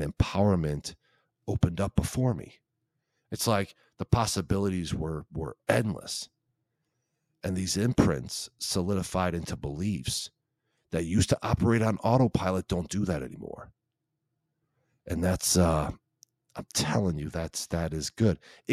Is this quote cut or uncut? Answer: uncut